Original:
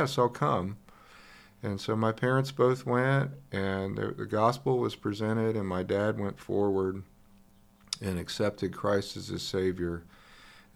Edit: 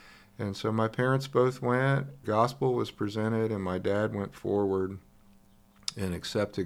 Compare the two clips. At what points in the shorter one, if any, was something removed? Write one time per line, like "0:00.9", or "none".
0:02.2